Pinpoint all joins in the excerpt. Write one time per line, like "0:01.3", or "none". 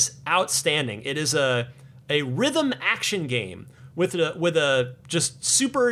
none